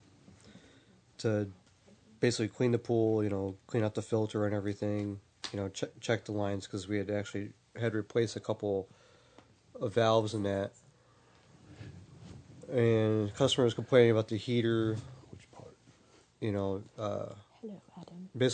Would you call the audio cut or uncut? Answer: uncut